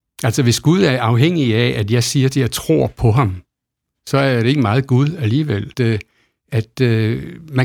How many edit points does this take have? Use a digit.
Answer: 1